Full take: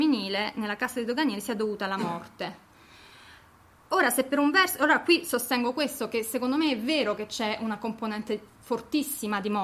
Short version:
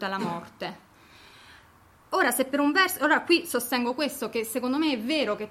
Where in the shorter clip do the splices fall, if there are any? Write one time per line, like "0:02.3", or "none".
none